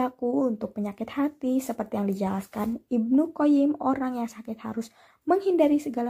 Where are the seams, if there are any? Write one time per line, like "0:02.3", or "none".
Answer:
none